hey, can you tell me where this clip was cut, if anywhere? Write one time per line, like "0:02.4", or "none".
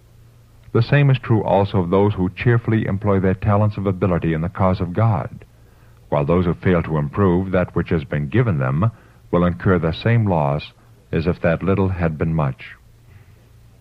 none